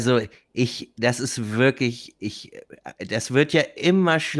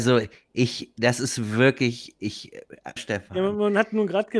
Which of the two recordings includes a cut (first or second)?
second